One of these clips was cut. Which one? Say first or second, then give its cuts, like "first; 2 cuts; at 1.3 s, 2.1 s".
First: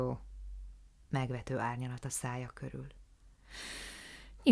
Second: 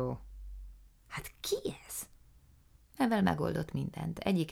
second; 2 cuts; at 1.0 s, 2.7 s